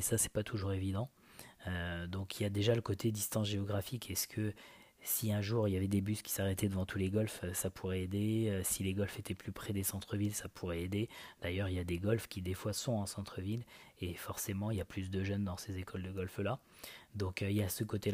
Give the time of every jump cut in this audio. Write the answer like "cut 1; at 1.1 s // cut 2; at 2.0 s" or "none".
none